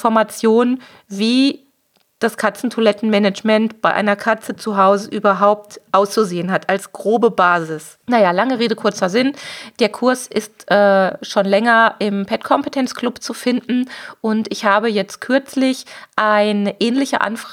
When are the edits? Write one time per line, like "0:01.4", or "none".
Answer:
0:08.0